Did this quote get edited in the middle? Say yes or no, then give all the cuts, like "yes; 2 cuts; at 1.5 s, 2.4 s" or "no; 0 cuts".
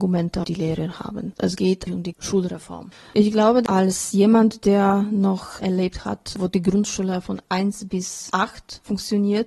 no; 0 cuts